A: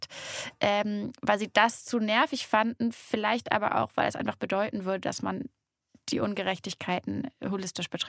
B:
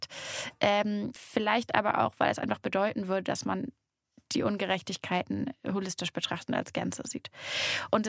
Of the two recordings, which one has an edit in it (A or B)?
B